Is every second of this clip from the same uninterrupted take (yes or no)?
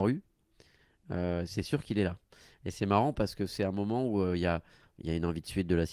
yes